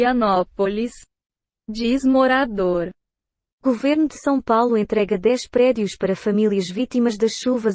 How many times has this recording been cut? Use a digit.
0